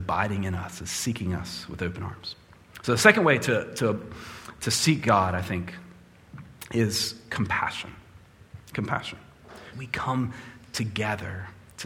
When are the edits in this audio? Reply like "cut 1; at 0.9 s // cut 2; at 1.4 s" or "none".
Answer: cut 1; at 9.7 s

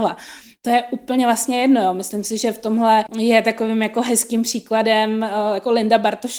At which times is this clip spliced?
cut 1; at 3.1 s

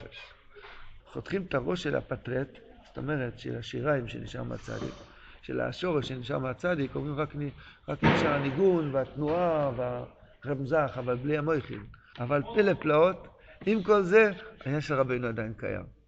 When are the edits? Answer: cut 1; at 1.0 s // cut 2; at 12.1 s

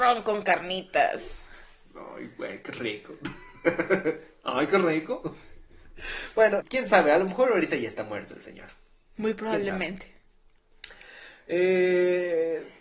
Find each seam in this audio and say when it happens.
cut 1; at 6.6 s

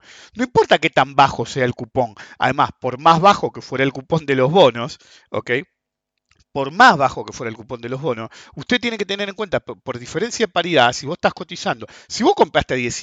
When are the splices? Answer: none

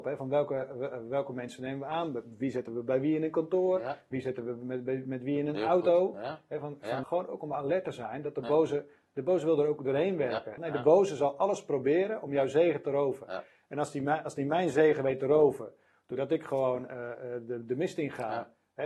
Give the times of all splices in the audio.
cut 1; at 7.0 s // cut 2; at 10.6 s

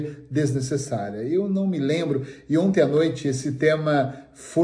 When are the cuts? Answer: none

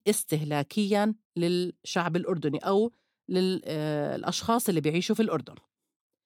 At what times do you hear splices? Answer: cut 1; at 1.2 s

